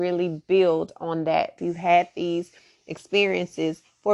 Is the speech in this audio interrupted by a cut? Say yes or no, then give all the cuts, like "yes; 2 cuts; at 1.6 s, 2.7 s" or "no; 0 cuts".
yes; 1 cut; at 1.6 s